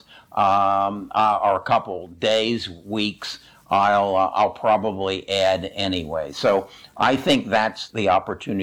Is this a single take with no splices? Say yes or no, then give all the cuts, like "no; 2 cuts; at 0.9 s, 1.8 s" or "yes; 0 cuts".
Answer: yes; 0 cuts